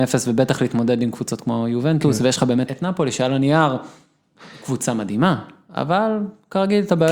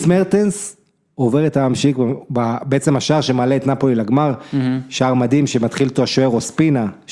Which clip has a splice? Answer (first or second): first